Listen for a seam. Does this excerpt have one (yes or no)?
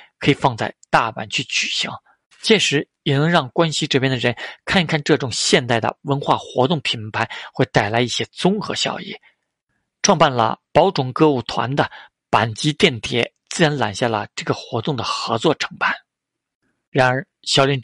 no